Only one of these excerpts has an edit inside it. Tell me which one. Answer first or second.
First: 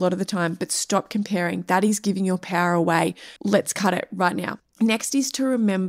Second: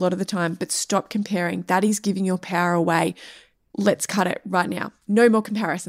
first